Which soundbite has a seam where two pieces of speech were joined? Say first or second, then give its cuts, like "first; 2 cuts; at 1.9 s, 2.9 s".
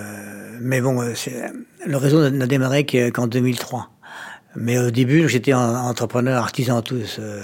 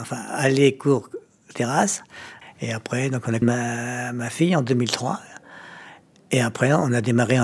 second; 2 cuts; at 2.4 s, 3.4 s